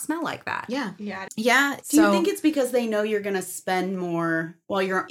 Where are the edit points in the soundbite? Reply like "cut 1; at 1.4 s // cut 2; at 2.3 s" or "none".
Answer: cut 1; at 1.3 s

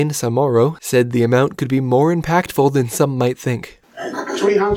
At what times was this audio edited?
cut 1; at 3.8 s

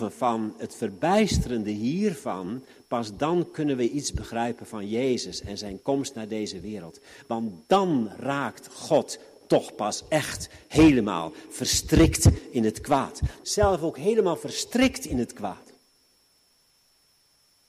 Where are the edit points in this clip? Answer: cut 1; at 13.4 s

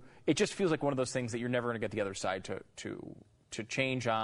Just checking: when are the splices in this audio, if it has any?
none

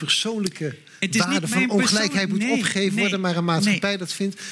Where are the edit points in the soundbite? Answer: none

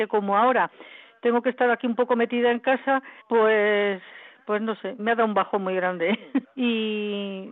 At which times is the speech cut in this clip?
cut 1; at 3.2 s // cut 2; at 5.0 s // cut 3; at 6.4 s

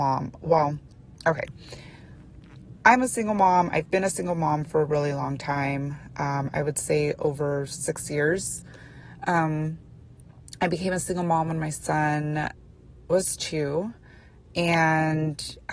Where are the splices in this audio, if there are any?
none

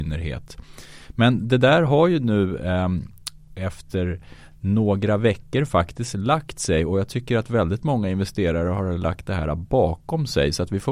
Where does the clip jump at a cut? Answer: none

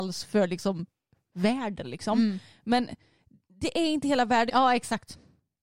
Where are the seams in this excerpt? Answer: cut 1; at 1.8 s // cut 2; at 4.5 s

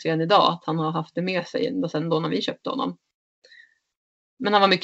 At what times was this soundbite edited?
none

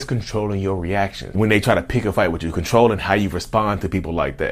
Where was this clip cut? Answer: cut 1; at 1.3 s

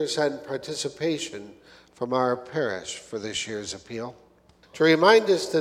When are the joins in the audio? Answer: cut 1; at 4.6 s

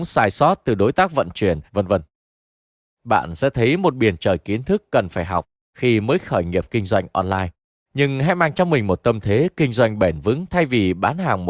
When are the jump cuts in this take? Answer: cut 1; at 1.7 s

